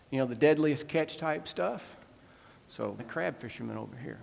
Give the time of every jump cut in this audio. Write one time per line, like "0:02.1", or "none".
0:03.0